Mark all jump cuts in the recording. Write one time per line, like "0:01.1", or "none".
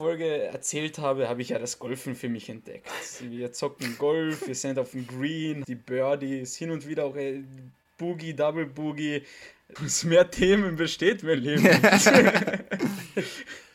0:05.6
0:09.8